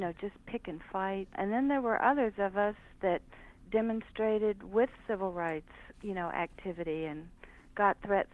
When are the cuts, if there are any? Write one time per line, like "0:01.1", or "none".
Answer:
0:01.3
0:05.9